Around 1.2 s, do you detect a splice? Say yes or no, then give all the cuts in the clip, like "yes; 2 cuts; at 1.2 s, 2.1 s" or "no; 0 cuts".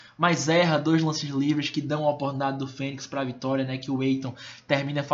no; 0 cuts